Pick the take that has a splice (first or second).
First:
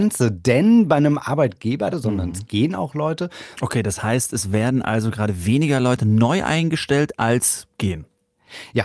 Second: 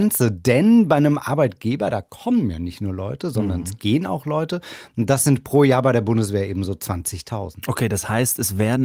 first